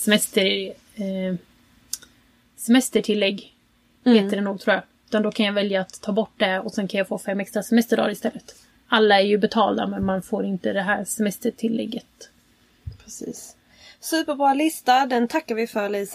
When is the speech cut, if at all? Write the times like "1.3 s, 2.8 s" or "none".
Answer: none